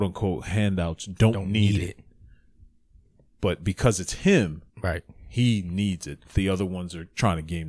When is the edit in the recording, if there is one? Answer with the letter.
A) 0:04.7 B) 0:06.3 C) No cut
A